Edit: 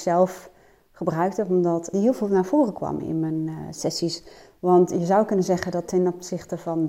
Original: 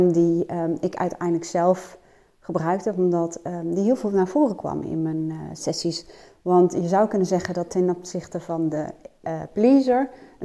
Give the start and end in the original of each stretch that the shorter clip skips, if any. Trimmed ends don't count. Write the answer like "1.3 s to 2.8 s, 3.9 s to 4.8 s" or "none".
3.4 s to 3.8 s